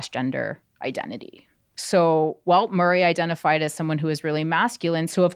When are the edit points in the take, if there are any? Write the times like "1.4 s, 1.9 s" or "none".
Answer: none